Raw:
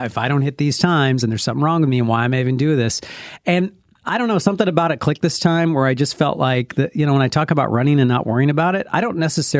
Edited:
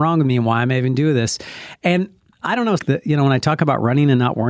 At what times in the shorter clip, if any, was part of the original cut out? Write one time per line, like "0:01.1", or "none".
0:02.8